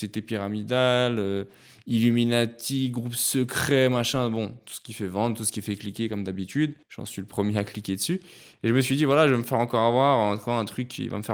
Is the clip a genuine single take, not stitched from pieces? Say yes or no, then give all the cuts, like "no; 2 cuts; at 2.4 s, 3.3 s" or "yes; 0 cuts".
no; 1 cut; at 6.8 s